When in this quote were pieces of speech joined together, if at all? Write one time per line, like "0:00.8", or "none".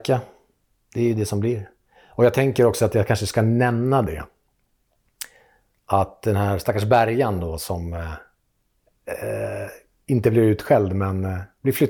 none